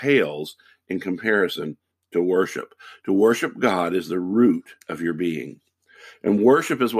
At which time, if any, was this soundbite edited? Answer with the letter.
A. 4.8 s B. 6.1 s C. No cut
A